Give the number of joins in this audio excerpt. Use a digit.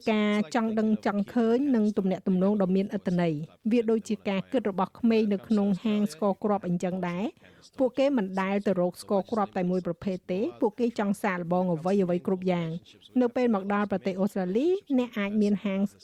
0